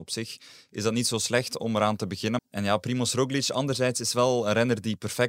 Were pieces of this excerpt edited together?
yes; 1 cut; at 2.4 s

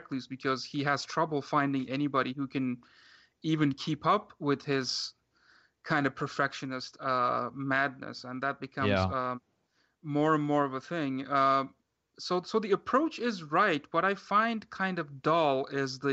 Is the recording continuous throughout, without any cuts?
yes; 0 cuts

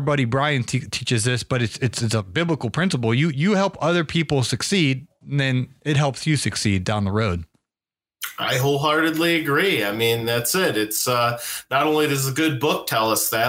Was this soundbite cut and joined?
no; 0 cuts

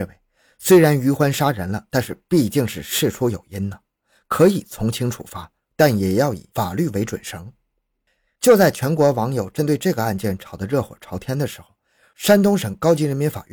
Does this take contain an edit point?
no; 0 cuts

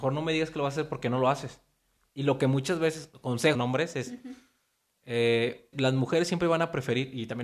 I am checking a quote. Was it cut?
yes; 2 cuts; at 3.5 s, 5.7 s

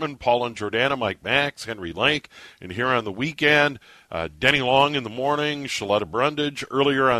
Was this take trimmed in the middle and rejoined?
no; 0 cuts

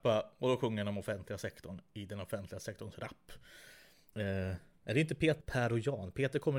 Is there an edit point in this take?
yes; 2 cuts; at 4.1 s, 5.4 s

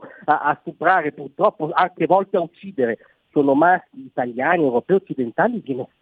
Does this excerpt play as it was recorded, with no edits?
yes; 0 cuts

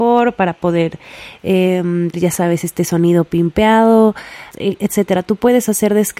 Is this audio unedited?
no; 2 cuts; at 2.1 s, 4.5 s

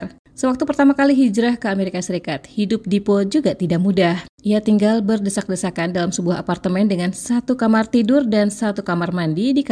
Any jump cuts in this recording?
no; 0 cuts

